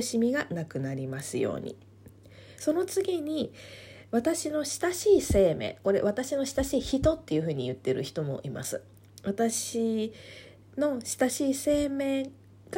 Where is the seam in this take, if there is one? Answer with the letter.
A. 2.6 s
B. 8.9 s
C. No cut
A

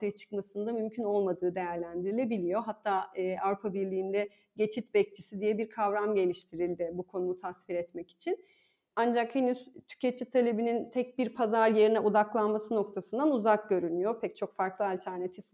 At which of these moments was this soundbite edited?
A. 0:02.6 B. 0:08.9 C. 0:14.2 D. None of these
B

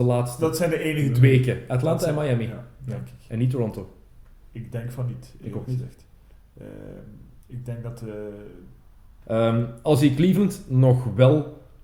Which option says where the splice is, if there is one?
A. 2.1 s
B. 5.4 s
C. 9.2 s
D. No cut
C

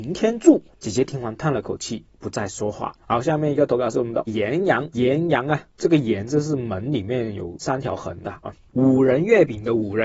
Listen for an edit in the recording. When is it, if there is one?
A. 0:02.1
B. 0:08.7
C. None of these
B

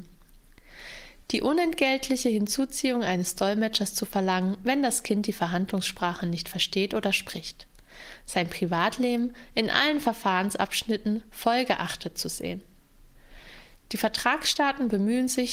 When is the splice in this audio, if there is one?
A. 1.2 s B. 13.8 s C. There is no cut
C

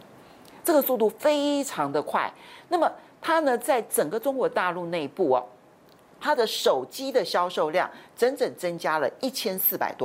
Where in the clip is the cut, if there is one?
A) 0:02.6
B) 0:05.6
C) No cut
C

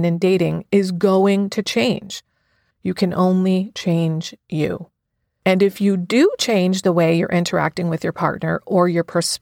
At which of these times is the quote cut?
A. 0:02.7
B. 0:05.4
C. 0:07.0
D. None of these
A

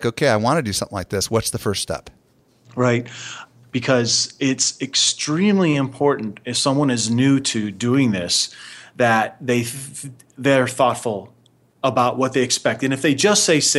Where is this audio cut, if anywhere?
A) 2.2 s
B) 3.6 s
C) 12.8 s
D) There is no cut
B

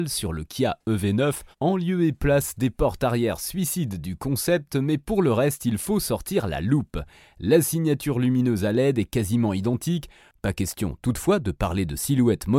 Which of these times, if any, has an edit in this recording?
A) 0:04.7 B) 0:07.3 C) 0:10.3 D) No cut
C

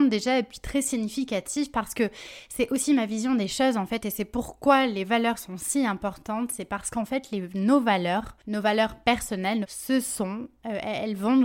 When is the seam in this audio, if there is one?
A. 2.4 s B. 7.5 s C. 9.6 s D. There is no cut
C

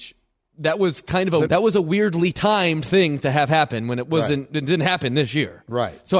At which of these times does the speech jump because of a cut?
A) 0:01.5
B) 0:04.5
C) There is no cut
A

